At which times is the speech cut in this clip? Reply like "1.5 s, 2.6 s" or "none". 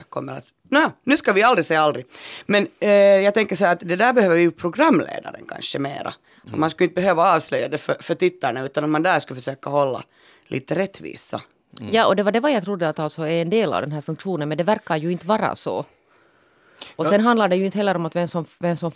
none